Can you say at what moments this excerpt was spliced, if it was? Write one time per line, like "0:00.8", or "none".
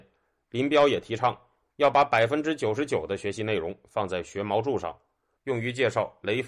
0:05.4